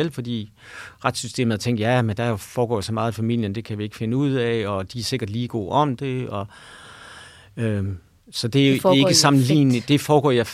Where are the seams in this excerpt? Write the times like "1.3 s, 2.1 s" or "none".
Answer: none